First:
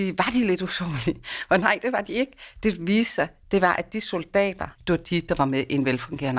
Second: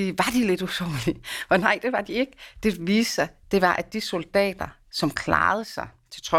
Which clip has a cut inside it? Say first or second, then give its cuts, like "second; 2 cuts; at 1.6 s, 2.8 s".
first; 1 cut; at 4.7 s